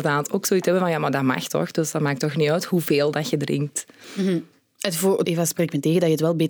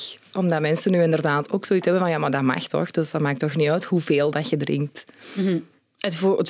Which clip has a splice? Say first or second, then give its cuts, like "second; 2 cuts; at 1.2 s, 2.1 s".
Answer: first; 1 cut; at 5.2 s